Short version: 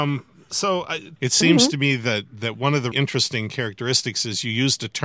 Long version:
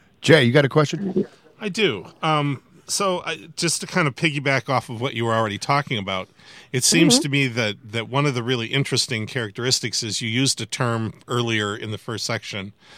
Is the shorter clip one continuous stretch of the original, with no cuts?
no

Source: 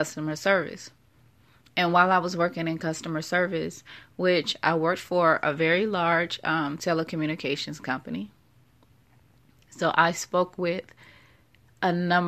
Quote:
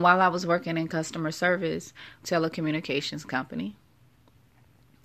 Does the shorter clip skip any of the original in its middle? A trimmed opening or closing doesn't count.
yes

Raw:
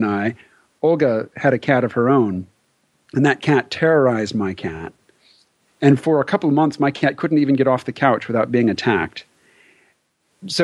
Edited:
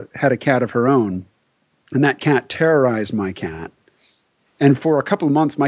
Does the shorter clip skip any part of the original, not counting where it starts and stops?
no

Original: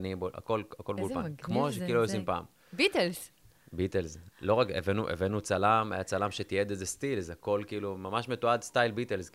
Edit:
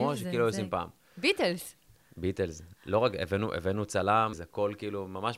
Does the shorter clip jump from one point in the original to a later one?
yes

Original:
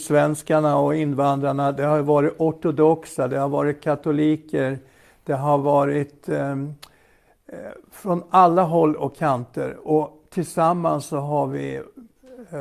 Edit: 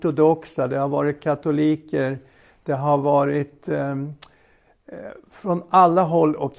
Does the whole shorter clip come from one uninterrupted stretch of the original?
yes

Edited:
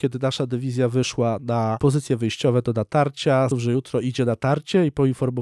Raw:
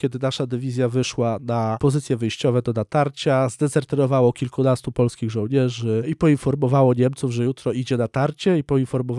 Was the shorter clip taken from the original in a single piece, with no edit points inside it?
no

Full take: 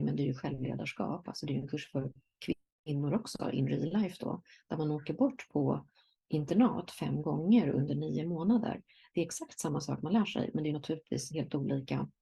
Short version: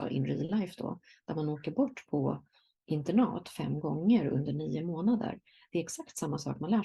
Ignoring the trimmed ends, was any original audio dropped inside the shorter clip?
no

